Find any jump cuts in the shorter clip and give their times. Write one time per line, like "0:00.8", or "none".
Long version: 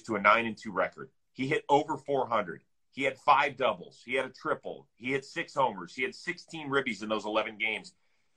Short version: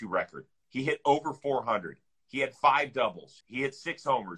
0:03.4